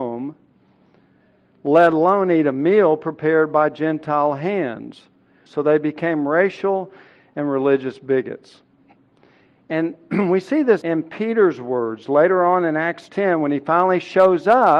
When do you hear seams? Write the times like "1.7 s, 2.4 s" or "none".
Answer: 5.5 s, 10.8 s